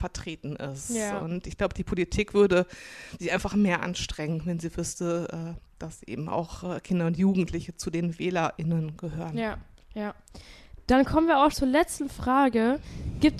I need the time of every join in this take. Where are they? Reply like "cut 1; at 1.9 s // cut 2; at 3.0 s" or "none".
cut 1; at 11.5 s